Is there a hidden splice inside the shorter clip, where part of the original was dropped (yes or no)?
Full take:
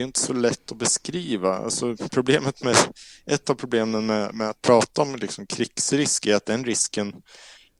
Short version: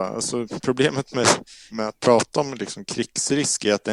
yes